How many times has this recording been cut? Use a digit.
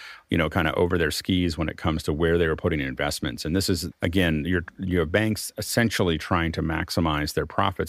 1